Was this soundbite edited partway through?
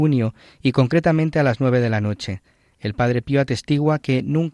no; 0 cuts

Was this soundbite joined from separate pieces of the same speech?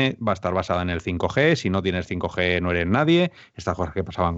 no; 0 cuts

